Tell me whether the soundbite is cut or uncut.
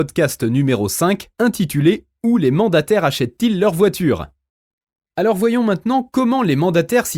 uncut